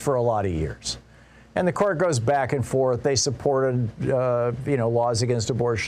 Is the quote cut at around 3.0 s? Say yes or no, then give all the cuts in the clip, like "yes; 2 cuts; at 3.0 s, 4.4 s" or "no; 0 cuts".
no; 0 cuts